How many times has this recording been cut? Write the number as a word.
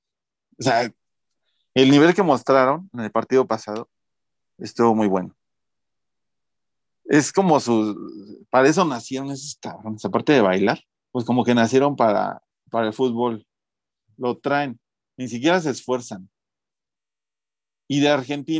one